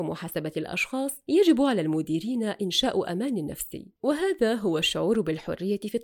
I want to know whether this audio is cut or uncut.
uncut